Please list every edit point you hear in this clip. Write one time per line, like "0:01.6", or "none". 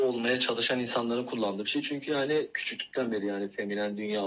none